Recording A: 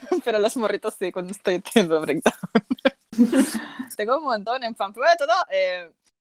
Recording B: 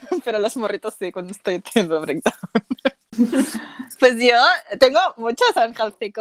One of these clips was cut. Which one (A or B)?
A